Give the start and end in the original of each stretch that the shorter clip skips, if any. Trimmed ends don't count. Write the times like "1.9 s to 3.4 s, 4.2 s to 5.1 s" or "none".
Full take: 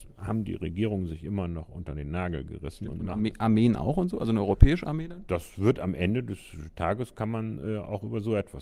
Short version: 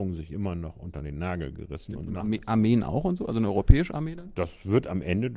none